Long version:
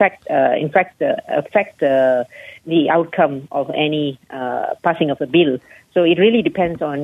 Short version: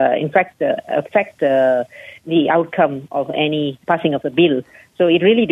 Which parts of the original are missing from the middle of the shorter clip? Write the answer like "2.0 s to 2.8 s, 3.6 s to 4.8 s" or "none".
4.2 s to 4.8 s